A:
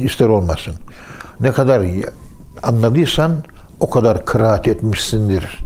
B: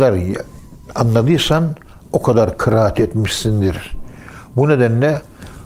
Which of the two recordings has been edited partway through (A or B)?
A